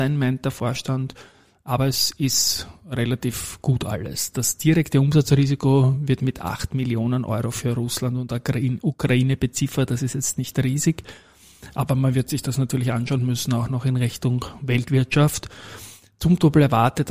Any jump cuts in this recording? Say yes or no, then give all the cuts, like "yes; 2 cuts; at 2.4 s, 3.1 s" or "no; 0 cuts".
no; 0 cuts